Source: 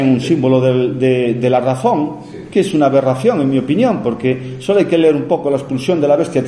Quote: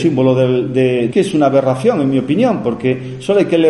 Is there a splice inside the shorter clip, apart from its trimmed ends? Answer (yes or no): yes